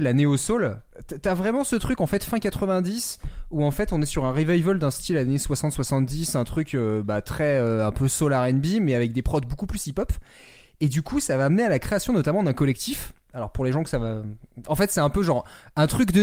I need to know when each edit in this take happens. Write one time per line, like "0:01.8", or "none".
none